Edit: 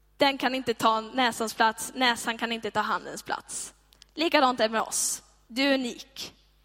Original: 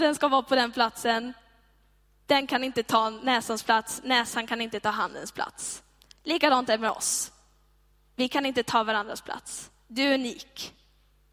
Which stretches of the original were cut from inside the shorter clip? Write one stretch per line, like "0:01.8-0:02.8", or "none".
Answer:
0:07.5-0:09.9